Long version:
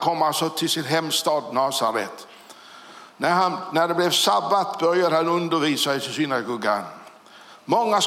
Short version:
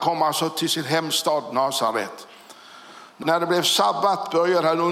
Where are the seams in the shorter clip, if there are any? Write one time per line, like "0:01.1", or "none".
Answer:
0:03.2